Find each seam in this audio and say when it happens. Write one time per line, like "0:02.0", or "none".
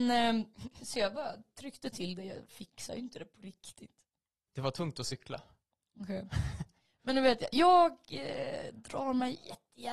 0:04.5

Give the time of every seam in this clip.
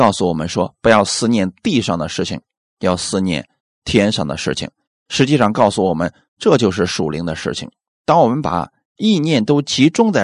none

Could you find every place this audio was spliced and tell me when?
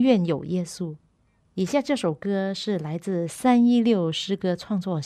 none

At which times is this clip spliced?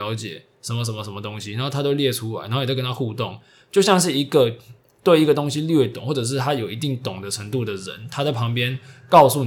none

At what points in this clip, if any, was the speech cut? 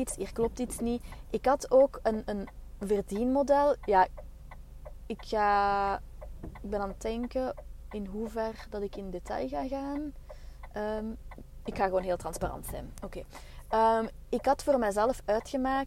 none

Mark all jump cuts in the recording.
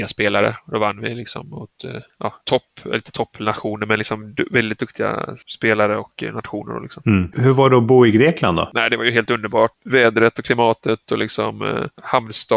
none

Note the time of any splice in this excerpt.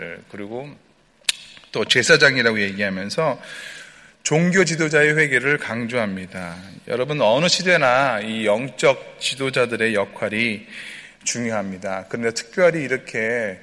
none

